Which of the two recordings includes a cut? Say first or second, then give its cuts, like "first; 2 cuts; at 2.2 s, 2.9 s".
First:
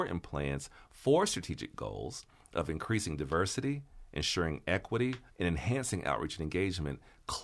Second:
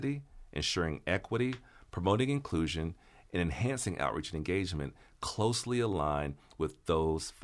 first; 1 cut; at 5.3 s